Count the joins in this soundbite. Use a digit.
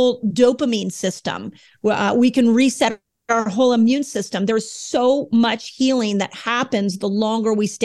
0